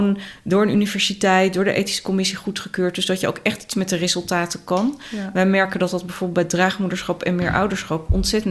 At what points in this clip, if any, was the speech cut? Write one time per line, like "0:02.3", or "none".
none